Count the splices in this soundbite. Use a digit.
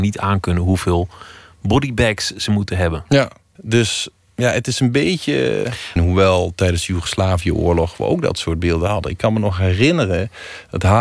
2